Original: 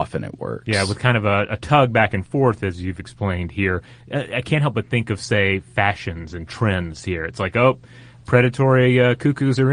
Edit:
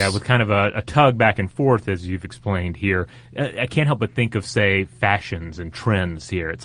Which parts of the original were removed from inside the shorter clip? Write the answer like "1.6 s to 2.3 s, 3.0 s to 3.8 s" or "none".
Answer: none